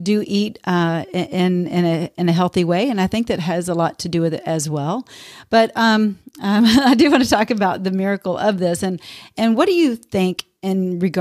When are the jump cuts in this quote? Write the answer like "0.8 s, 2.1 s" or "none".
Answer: none